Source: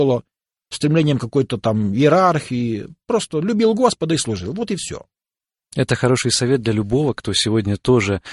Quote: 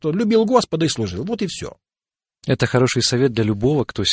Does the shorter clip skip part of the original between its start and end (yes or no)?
no